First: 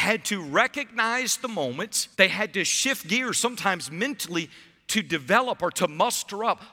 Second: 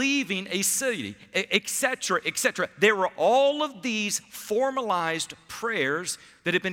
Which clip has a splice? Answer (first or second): first